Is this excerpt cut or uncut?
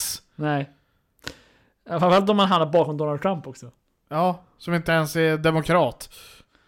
uncut